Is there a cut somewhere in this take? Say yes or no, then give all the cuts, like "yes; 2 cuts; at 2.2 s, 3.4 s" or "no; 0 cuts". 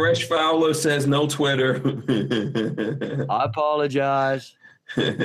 no; 0 cuts